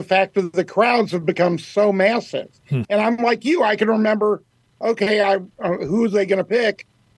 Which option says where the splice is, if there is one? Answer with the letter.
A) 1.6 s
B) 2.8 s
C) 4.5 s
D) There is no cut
B